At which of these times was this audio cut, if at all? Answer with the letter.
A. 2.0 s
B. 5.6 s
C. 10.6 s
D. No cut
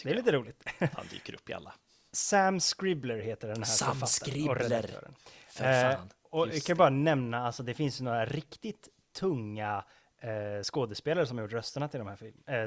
D